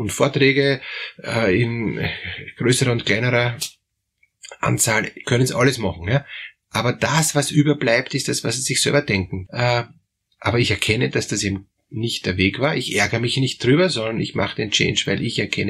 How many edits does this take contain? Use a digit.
1